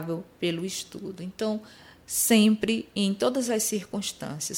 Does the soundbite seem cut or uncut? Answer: uncut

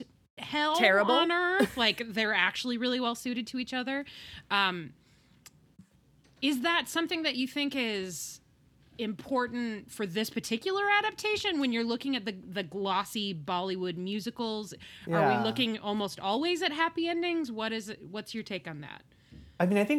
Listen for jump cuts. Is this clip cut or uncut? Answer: uncut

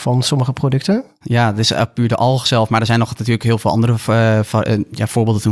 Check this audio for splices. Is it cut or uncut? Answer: cut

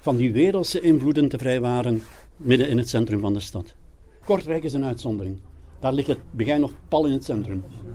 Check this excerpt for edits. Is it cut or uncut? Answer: cut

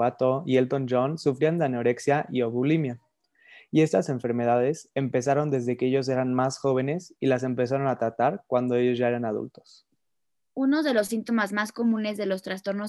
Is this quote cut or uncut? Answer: uncut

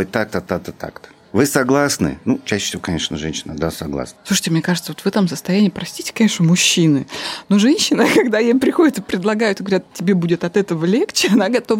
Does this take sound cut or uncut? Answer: uncut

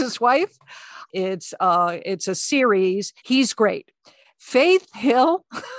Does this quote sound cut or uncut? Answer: cut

